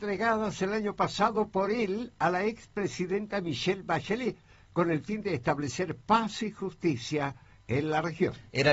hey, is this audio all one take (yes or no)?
yes